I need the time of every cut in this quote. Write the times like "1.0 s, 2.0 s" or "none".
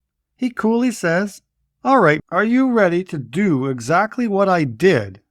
2.2 s